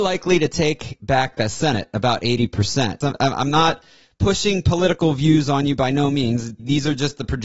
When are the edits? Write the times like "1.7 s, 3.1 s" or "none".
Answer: 3.0 s